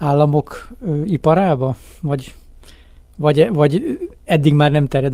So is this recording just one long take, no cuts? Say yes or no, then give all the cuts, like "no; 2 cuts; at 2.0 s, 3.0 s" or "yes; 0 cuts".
yes; 0 cuts